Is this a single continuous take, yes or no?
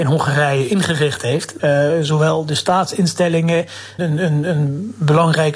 no